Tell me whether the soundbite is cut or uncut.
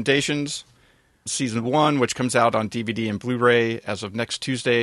cut